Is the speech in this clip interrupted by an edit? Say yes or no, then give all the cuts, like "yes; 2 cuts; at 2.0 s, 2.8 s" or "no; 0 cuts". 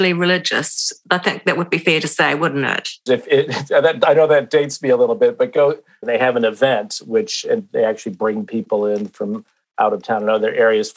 yes; 2 cuts; at 3.1 s, 6.0 s